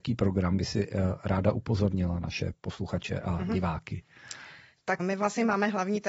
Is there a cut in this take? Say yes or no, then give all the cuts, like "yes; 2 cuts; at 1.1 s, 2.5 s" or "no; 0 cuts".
yes; 1 cut; at 5.0 s